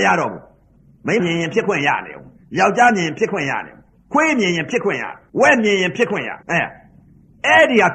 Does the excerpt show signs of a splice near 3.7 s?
no; 3 cuts; at 1.2 s, 5.3 s, 6.4 s

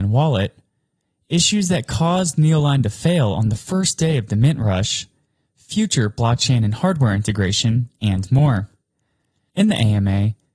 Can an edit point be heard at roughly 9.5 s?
yes; 1 cut; at 9.5 s

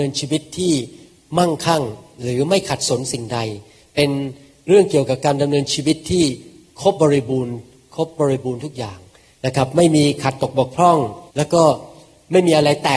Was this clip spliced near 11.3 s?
yes; 2 cuts; at 7.0 s, 11.3 s

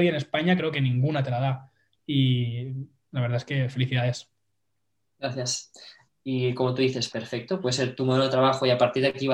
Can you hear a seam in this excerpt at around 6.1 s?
yes; 3 cuts; at 2.0 s, 6.1 s, 7.1 s

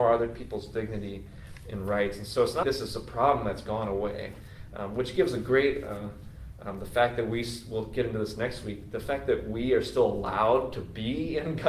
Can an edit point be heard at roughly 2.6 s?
yes; 1 cut; at 2.6 s

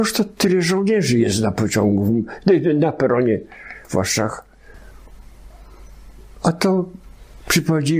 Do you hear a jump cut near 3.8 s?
yes; 1 cut; at 3.8 s

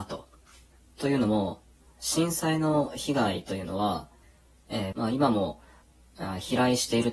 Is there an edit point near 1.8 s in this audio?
no; 1 cut; at 4.9 s

